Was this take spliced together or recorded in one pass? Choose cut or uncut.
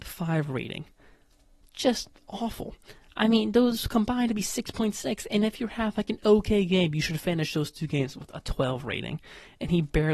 uncut